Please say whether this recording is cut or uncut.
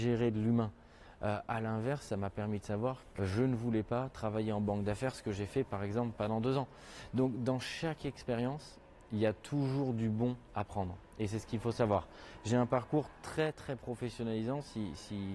cut